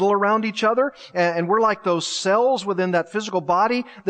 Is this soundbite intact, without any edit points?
yes; 0 cuts

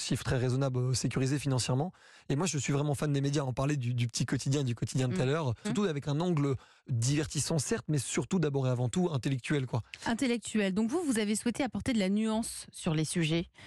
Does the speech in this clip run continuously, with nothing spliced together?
no; 1 cut; at 5.6 s

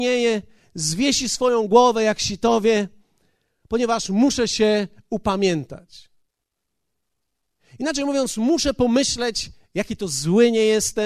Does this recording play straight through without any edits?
yes; 0 cuts

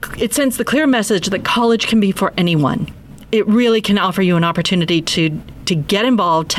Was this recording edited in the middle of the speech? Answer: no; 0 cuts

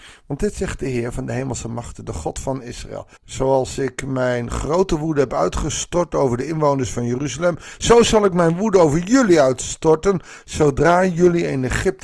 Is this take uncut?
no; 1 cut; at 3.2 s

